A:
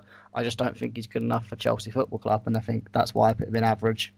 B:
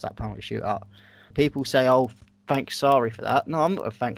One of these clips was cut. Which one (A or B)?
B